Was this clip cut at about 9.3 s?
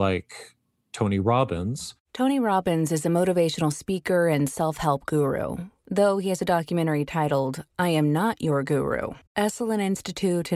yes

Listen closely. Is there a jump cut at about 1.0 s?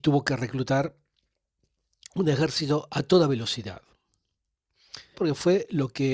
no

